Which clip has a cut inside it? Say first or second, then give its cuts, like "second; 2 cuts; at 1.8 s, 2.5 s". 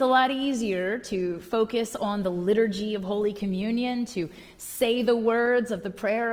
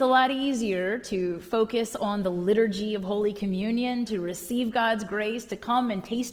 second; 1 cut; at 4.1 s